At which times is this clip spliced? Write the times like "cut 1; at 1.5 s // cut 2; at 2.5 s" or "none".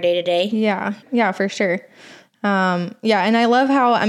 cut 1; at 1.0 s